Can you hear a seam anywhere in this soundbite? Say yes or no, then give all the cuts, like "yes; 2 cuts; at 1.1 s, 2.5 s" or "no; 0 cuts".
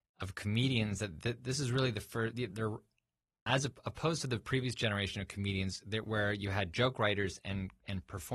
yes; 1 cut; at 2.5 s